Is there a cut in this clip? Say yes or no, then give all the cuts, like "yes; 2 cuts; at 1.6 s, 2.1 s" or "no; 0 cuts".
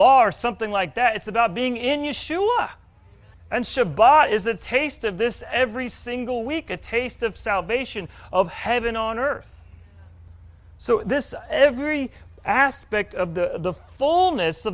yes; 1 cut; at 3.3 s